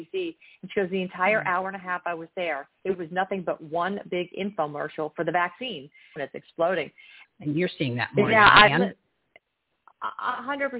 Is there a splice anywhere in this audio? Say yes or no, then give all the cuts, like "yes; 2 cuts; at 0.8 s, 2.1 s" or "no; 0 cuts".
yes; 2 cuts; at 6.2 s, 7.2 s